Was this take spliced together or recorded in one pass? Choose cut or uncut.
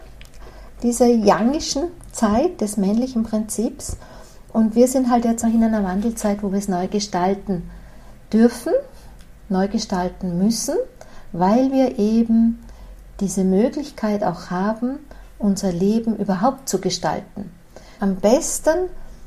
cut